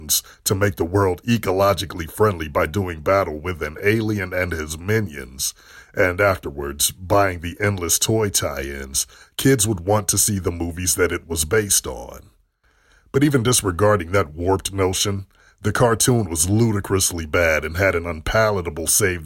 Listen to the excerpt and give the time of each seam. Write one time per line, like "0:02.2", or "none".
none